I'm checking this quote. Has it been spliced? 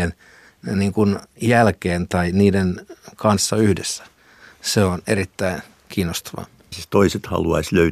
yes; 1 cut; at 6.7 s

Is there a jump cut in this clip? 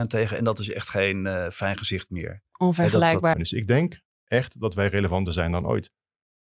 yes; 1 cut; at 3.3 s

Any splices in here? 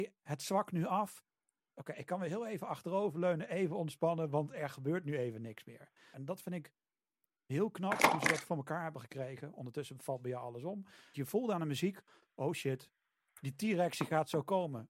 yes; 2 cuts; at 6.1 s, 11.1 s

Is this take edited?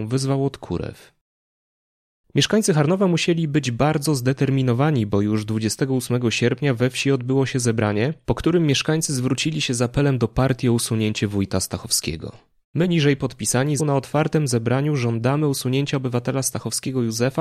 yes; 2 cuts; at 12.6 s, 13.8 s

